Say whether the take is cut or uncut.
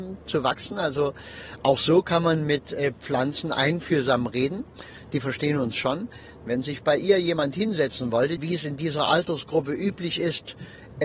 cut